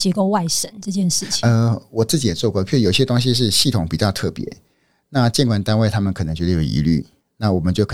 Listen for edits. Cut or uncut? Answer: uncut